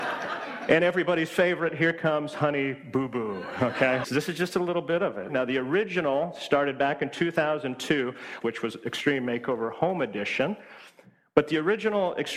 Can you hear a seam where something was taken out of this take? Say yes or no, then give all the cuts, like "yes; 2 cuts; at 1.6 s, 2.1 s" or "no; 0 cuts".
yes; 3 cuts; at 4.0 s, 5.3 s, 8.4 s